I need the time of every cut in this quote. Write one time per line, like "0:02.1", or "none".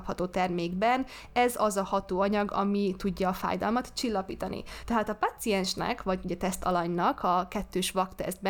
0:04.8